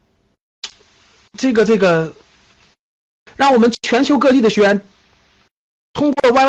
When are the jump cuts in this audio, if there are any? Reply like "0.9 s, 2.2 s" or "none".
3.3 s